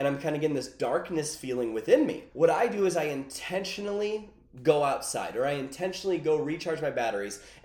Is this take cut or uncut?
cut